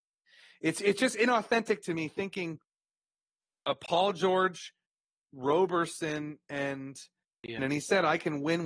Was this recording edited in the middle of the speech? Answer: yes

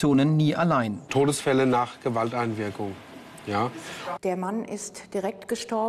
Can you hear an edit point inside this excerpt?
yes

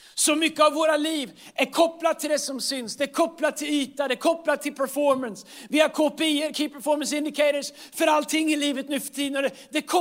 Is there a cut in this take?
no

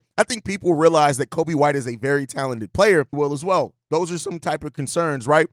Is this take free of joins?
no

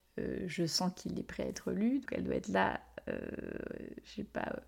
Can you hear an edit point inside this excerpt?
yes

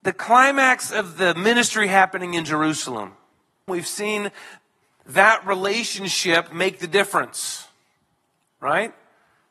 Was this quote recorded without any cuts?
no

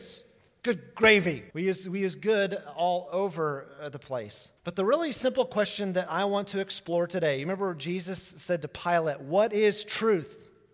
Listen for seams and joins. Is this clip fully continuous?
no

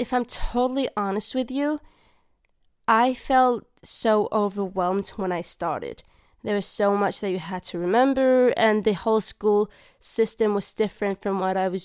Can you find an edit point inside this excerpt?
no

